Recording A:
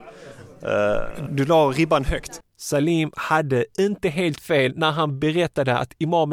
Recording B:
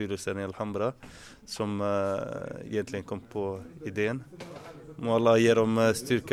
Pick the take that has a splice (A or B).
A